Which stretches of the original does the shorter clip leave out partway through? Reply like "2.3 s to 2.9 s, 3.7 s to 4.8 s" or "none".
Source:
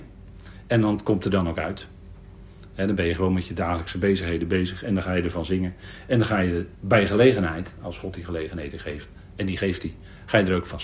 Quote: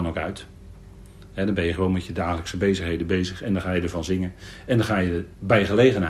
none